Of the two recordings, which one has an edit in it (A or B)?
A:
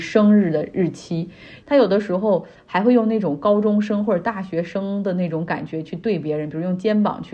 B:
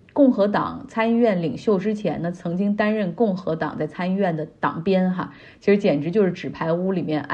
A